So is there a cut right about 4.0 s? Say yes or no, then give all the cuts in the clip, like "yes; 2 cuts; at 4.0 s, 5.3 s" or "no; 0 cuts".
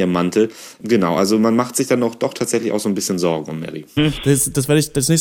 yes; 1 cut; at 4.0 s